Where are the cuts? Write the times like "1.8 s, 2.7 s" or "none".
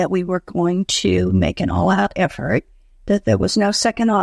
none